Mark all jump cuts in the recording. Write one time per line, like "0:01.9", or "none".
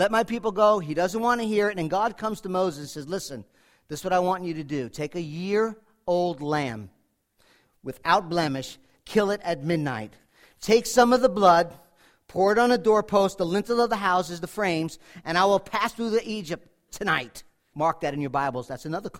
0:17.7